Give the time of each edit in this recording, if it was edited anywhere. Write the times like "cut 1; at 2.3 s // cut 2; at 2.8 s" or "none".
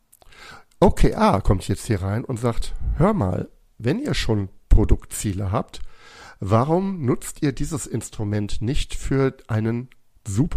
none